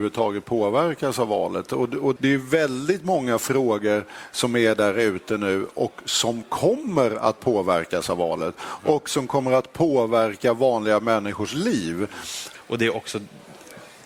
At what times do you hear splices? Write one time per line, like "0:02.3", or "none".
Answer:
0:02.2
0:12.5